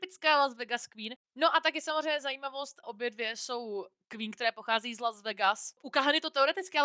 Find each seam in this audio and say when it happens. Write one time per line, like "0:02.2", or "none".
0:01.2
0:02.8